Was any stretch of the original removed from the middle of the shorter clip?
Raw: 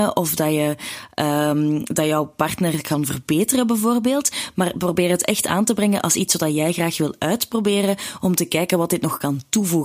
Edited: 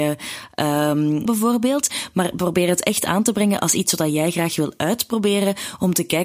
yes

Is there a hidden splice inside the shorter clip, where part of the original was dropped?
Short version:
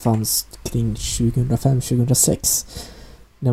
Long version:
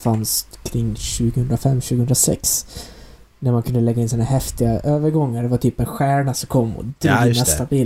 no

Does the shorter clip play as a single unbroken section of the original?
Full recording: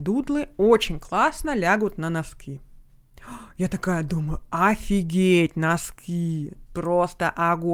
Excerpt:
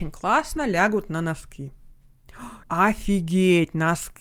no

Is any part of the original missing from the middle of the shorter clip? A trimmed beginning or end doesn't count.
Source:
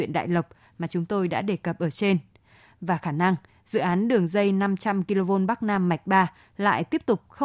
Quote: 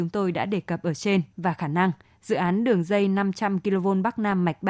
yes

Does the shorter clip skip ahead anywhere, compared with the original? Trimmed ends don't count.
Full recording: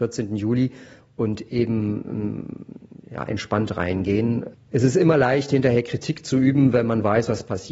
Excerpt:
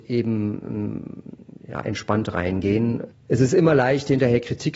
no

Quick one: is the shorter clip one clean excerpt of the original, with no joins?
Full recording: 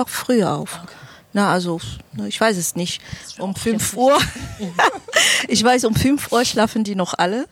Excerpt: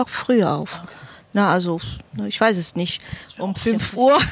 yes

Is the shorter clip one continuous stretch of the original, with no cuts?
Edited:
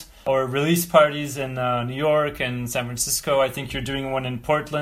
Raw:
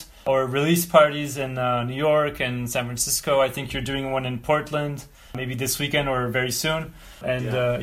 yes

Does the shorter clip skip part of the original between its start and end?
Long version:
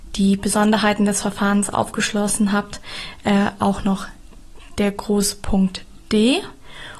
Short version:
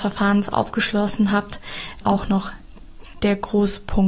yes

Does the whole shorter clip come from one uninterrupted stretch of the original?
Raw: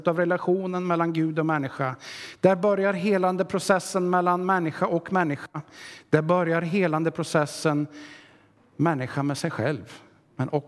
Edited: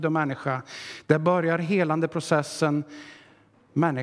no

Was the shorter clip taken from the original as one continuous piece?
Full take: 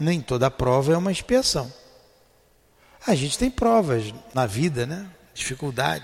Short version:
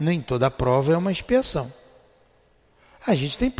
yes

